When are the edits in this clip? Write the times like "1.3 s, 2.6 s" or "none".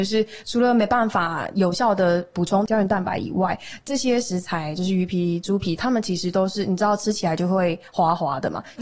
none

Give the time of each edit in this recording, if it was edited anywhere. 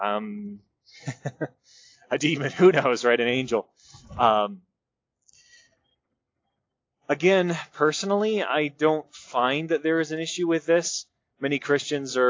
none

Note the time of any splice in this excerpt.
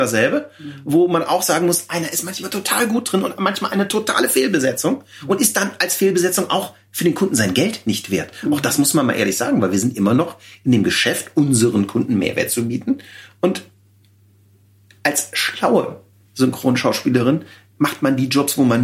none

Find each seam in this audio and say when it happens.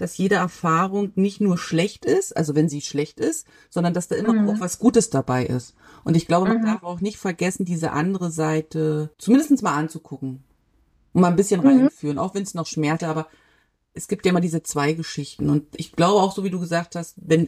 9.1 s, 13.0 s

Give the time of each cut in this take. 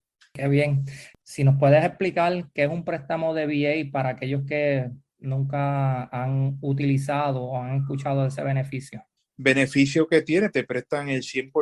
1.1 s, 9.2 s, 10.5 s

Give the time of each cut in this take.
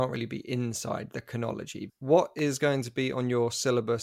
1.9 s

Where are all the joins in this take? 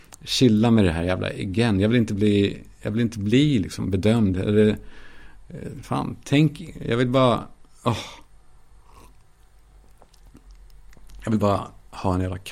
none

